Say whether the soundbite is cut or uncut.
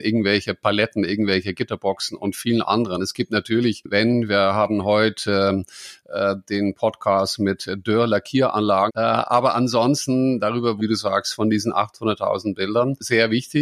cut